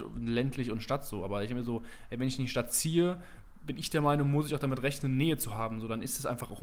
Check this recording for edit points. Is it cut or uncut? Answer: uncut